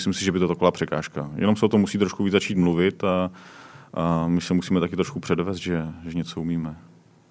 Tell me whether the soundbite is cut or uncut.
uncut